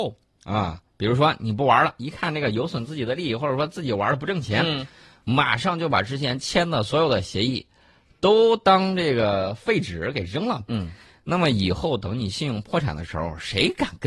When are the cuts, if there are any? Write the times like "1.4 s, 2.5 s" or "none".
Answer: none